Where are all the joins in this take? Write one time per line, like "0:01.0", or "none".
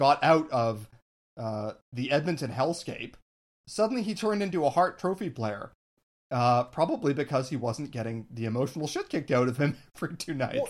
0:03.6